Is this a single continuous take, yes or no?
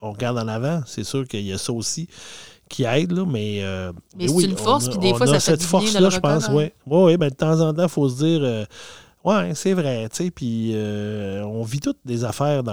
yes